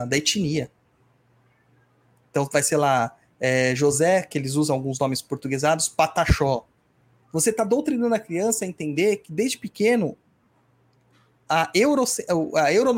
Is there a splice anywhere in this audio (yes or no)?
yes